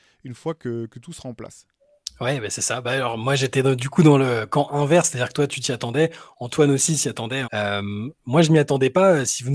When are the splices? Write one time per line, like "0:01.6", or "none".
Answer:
0:07.4